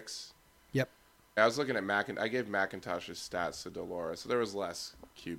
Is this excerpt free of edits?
no; 1 cut; at 1.4 s

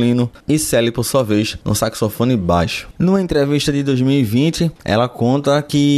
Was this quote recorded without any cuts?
no; 1 cut; at 2.9 s

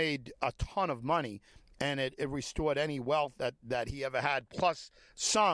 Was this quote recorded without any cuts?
yes; 0 cuts

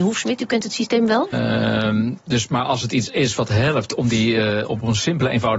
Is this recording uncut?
no; 1 cut; at 1.3 s

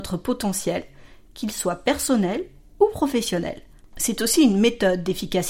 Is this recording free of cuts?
no; 1 cut; at 3.8 s

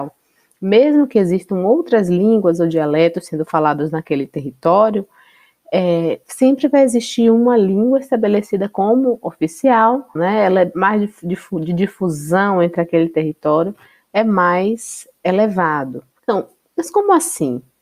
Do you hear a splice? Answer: yes; 2 cuts; at 10.2 s, 16.2 s

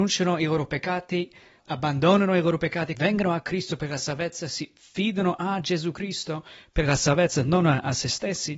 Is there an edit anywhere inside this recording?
yes; 2 cuts; at 1.6 s, 2.9 s

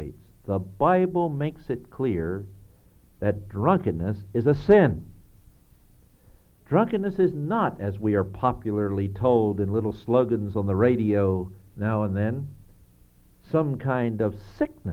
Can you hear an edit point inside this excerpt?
no; 0 cuts

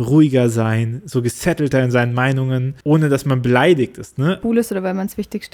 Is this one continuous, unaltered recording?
no; 2 cuts; at 2.8 s, 4.4 s

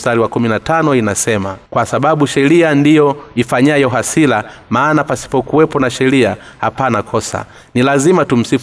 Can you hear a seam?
yes; 1 cut; at 1.7 s

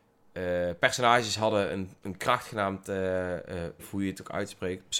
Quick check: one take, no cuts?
no; 1 cut; at 3.8 s

